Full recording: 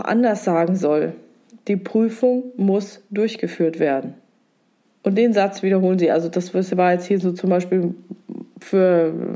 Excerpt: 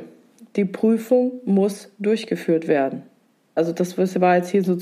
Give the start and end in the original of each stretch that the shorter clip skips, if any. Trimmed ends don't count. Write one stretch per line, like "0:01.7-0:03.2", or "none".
0:04.7-0:06.1